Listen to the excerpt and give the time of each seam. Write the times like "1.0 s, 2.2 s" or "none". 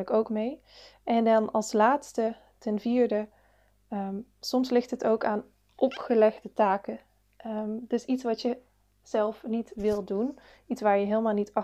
none